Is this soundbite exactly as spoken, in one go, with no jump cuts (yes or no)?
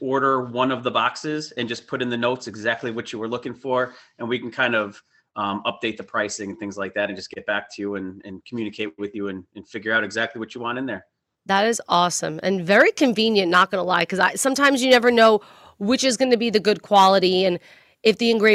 yes